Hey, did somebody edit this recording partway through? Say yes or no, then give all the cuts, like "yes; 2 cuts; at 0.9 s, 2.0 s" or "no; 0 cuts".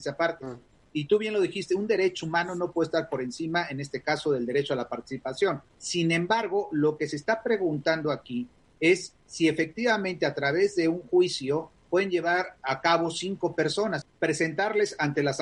yes; 2 cuts; at 5.7 s, 14.0 s